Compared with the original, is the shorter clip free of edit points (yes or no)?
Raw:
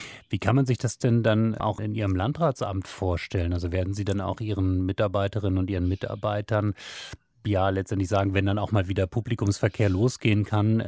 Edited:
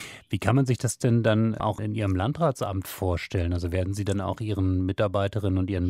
yes